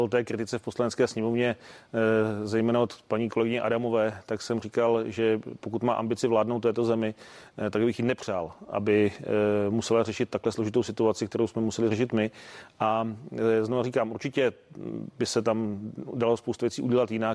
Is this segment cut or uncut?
uncut